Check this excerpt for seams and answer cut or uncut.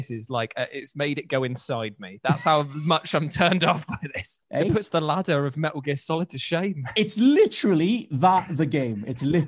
cut